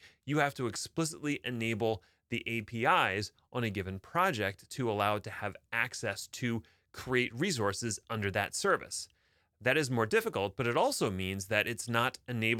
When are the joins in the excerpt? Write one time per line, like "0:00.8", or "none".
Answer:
none

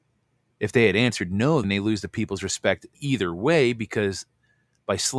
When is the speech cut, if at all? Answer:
0:01.6
0:02.9

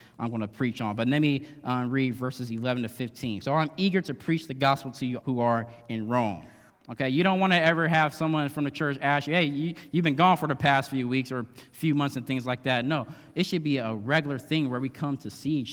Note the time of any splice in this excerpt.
0:03.4
0:05.2
0:06.7

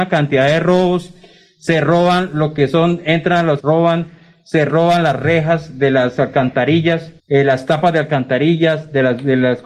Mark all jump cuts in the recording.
0:03.6
0:07.2

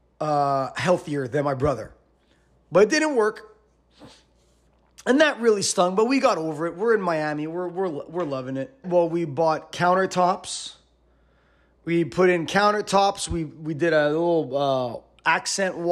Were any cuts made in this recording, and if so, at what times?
0:08.8

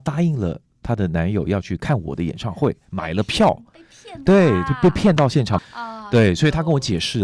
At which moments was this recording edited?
0:05.6

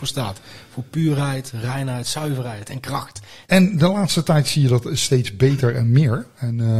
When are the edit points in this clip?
0:03.4

